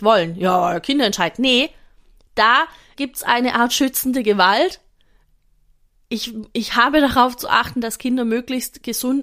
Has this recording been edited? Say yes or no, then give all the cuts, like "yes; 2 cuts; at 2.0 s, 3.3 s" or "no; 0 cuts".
yes; 1 cut; at 2.9 s